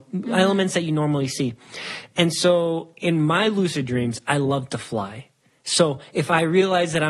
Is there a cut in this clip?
no; 0 cuts

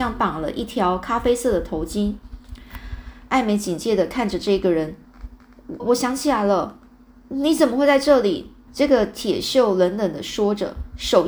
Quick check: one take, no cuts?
no; 2 cuts; at 5.8 s, 8.7 s

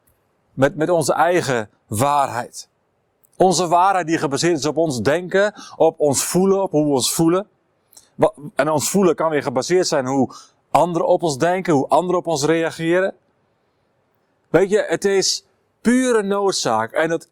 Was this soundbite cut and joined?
no; 0 cuts

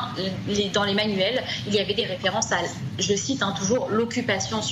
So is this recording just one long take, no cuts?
yes; 0 cuts

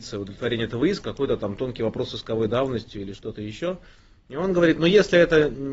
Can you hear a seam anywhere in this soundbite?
yes; 1 cut; at 1.0 s

